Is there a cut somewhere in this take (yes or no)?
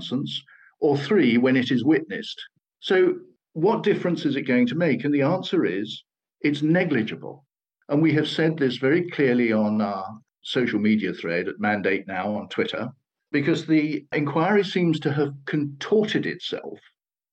yes